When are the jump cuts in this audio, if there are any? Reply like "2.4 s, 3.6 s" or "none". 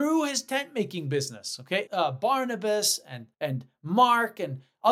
1.9 s, 3.3 s